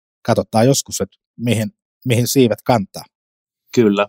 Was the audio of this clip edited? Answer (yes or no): no